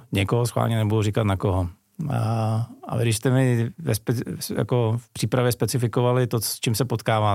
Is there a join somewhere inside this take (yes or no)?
no